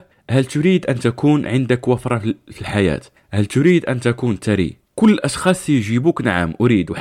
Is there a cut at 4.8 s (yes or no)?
yes